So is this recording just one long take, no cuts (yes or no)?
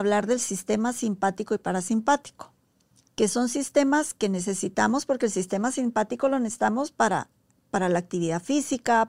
yes